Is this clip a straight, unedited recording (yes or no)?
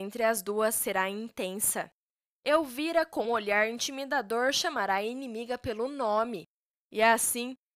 no